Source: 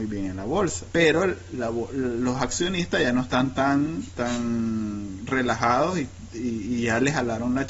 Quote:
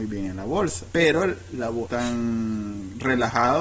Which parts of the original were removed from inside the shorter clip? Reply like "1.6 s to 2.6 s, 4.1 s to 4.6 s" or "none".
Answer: 1.9 s to 4.1 s